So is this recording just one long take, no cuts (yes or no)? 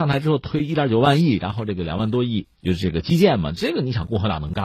no